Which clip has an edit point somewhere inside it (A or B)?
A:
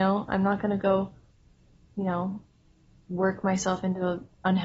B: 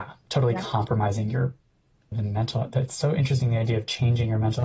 B